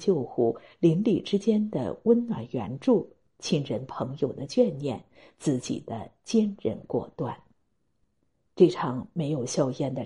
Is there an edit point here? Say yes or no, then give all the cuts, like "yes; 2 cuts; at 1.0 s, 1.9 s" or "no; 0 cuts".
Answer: no; 0 cuts